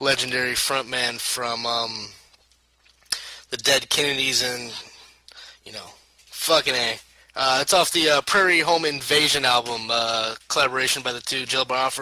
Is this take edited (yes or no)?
yes